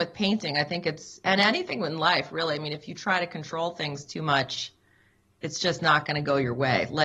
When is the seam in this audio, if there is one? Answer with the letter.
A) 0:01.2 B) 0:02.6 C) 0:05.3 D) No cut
D